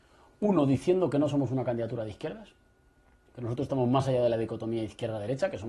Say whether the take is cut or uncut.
uncut